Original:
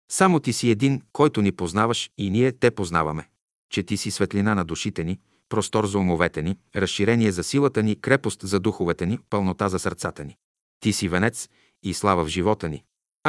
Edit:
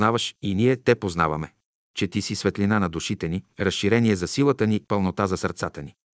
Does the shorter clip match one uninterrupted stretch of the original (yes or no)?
no